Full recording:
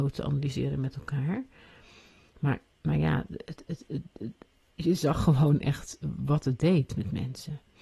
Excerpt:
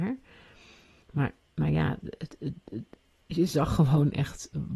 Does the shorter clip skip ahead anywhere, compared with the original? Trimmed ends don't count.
yes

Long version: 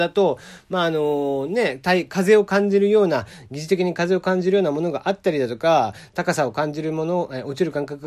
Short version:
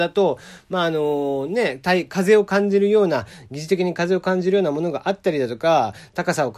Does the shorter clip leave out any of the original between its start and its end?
no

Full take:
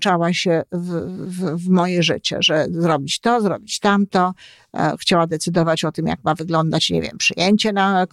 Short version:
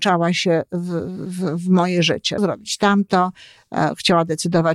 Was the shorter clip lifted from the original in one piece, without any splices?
no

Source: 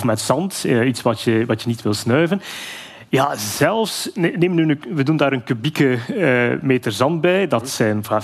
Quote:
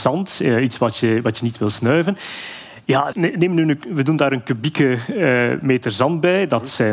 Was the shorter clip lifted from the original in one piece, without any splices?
no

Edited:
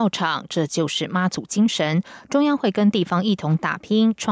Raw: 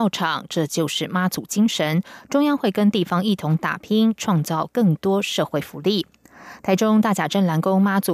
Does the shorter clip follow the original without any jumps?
yes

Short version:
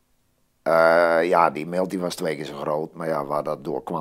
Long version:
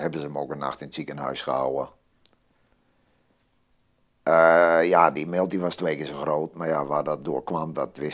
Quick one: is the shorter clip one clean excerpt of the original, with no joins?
yes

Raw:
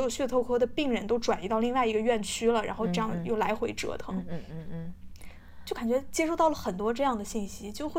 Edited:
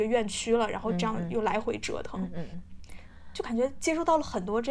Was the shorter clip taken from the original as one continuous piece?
no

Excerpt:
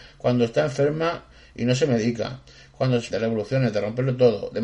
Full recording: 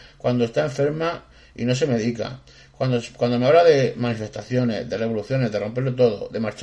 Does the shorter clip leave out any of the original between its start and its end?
yes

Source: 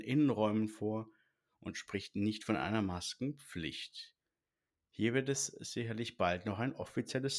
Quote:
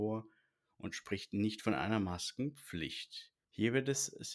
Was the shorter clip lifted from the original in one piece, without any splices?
no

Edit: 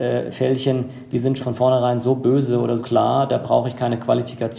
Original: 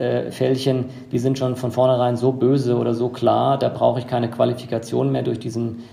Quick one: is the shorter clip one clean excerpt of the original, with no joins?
no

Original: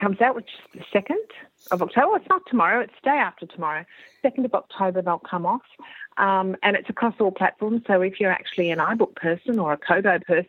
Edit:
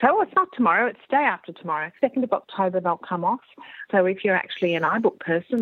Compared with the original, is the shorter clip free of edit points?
no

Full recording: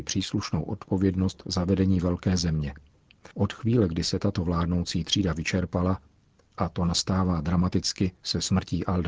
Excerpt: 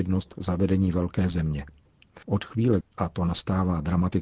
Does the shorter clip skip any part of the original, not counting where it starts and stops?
yes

